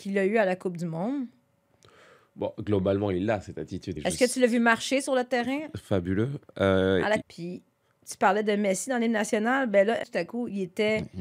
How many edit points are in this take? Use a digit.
3